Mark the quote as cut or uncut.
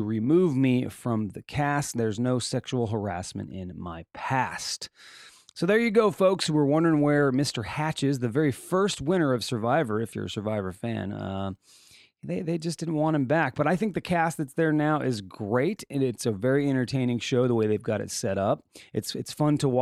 uncut